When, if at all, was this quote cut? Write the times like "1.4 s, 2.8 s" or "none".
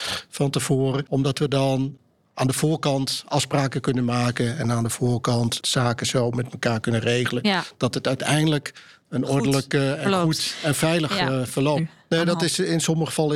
11.8 s